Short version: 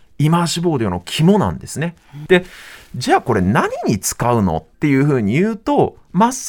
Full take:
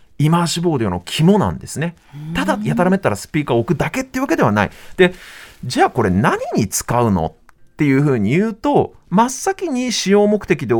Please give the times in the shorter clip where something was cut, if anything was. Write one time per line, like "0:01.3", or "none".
0:02.3
0:04.7